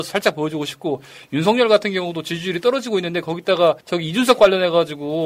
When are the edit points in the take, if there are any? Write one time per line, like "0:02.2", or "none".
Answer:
0:03.8